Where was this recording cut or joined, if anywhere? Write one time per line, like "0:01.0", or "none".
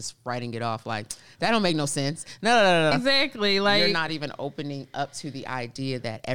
0:02.9

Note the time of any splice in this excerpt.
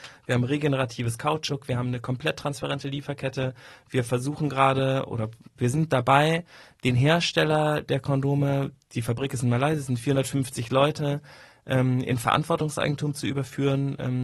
none

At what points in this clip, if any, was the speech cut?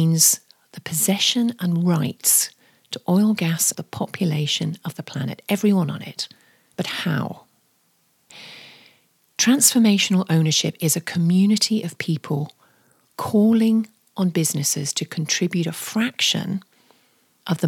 0:03.7

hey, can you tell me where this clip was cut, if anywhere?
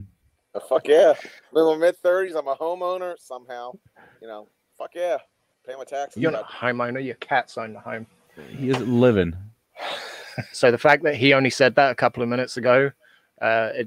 0:10.5

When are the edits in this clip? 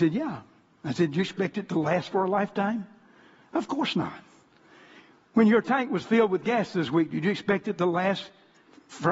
none

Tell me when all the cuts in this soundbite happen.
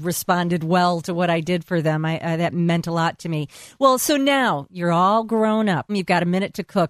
0:05.9

